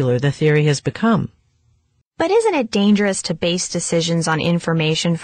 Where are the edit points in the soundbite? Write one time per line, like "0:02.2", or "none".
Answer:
0:02.0